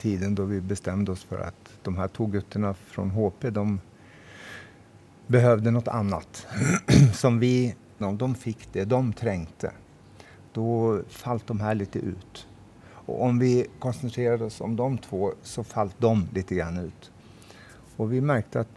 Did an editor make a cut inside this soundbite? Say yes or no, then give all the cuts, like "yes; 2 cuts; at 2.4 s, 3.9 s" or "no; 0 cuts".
yes; 1 cut; at 8.0 s